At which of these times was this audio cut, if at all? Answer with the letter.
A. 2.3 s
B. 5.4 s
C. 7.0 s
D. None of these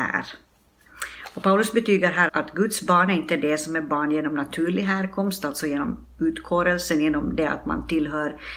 A